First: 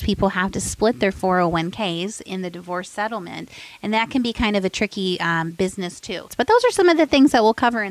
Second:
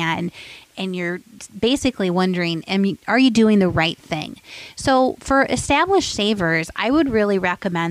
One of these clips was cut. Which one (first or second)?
first